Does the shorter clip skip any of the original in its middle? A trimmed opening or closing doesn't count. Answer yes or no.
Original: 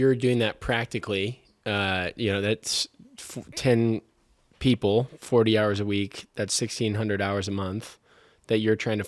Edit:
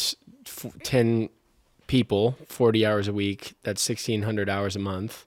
no